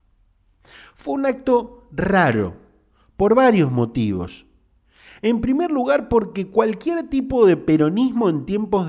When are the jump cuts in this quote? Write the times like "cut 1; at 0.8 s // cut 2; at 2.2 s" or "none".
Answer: none